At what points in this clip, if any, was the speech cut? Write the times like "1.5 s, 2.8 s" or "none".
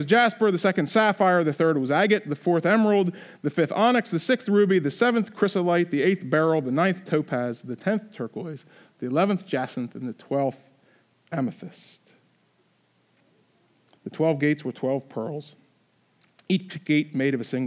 none